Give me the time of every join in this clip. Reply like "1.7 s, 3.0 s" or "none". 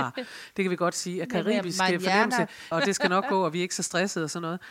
2.7 s